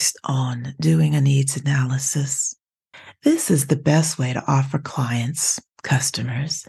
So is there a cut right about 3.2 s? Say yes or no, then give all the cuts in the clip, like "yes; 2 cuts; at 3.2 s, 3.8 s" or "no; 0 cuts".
no; 0 cuts